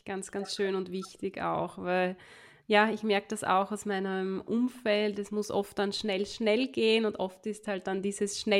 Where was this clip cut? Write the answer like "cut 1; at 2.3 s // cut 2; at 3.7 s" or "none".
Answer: none